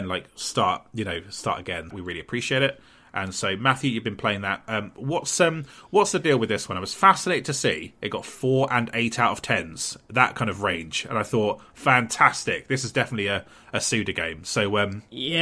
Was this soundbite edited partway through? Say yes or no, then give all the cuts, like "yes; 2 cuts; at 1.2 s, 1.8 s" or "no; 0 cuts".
yes; 1 cut; at 1.9 s